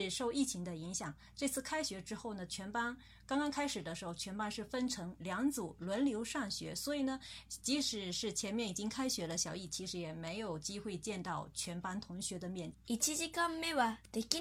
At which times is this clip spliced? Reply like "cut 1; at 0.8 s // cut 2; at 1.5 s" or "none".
cut 1; at 12.7 s